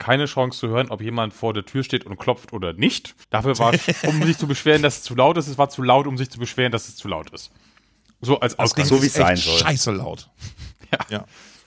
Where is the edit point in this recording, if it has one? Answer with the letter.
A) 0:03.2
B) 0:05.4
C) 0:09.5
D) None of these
A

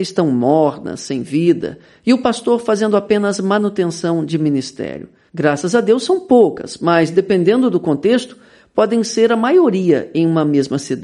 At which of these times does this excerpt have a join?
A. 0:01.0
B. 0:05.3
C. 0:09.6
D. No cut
B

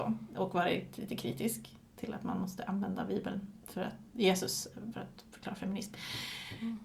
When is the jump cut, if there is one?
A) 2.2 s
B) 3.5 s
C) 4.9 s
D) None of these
C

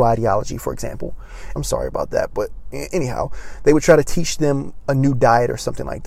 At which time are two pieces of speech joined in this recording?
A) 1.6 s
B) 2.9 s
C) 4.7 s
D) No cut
A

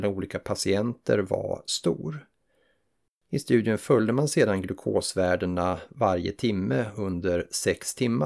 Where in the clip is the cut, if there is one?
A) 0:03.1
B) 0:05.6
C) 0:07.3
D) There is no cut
A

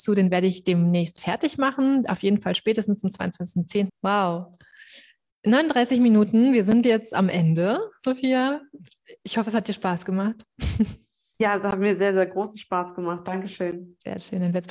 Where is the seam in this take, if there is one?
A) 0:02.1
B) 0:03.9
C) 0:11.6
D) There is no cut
B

